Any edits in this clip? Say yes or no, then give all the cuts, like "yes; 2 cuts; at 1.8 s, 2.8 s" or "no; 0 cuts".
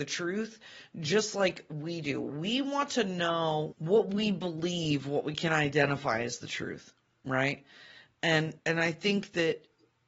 yes; 2 cuts; at 3.7 s, 8.6 s